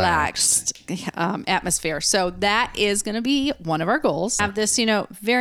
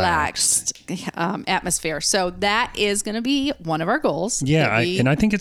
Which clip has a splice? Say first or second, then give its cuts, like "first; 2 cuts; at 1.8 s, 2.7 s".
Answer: first; 1 cut; at 4.4 s